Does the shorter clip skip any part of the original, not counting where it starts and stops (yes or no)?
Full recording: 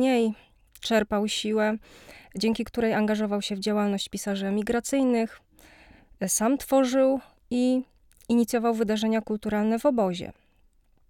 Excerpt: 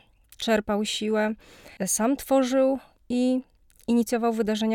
yes